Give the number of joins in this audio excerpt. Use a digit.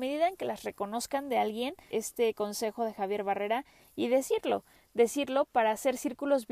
1